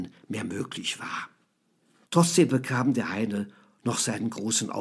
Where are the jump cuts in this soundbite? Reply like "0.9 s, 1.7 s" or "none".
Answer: 2.1 s